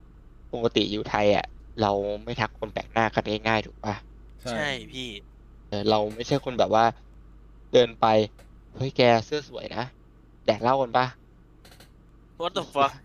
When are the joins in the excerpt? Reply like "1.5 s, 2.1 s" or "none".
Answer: 5.7 s